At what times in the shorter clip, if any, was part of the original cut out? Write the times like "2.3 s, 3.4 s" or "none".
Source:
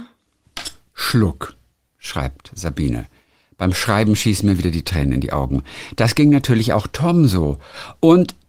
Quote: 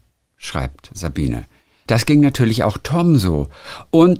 1.9 s